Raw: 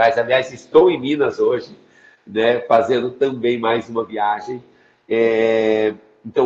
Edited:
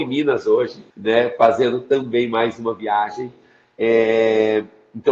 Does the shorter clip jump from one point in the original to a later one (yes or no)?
yes